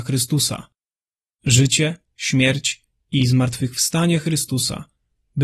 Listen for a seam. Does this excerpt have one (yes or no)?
no